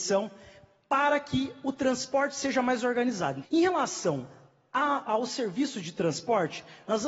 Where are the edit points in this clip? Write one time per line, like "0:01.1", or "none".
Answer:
0:03.4
0:05.1